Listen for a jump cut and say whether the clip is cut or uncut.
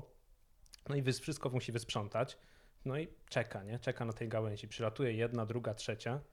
uncut